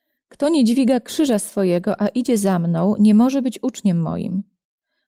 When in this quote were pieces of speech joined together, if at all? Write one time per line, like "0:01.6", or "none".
none